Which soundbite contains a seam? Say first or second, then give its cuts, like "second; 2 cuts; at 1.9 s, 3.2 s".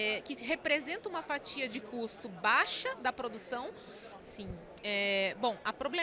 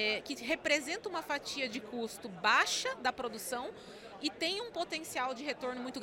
first; 1 cut; at 4.2 s